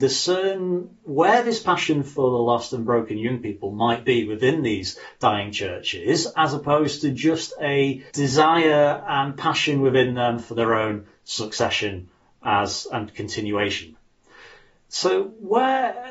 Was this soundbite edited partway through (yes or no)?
yes